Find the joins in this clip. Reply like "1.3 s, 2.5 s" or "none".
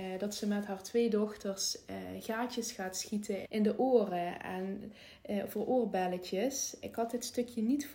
3.4 s, 6.8 s